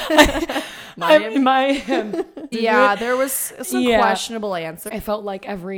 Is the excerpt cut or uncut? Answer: cut